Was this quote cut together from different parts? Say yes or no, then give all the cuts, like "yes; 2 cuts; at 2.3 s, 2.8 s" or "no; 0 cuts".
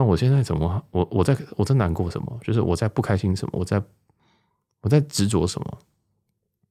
no; 0 cuts